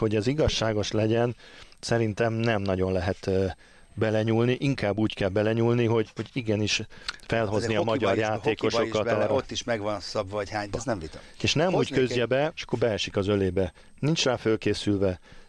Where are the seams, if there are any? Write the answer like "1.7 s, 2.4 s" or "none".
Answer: 10.7 s, 12.5 s